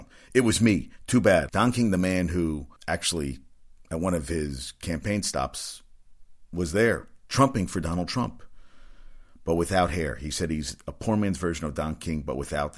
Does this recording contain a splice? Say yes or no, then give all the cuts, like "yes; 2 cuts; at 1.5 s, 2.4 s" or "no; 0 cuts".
yes; 2 cuts; at 1.5 s, 2.8 s